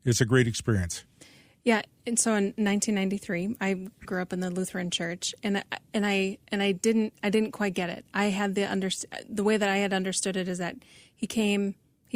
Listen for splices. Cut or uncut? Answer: cut